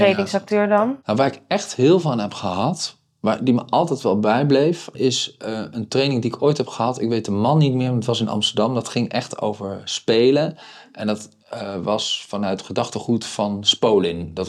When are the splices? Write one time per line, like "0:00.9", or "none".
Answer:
none